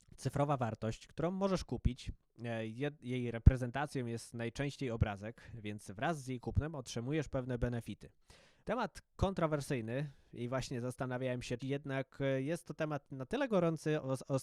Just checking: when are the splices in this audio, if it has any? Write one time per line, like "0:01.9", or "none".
0:08.6
0:11.6